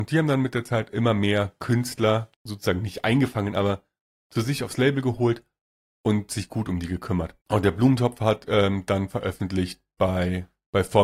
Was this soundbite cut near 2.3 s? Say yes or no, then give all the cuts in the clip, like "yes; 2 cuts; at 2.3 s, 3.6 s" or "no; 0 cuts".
yes; 1 cut; at 2.3 s